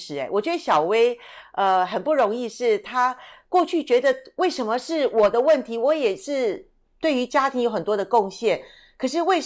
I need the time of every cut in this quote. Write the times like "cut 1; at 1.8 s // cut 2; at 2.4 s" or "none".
none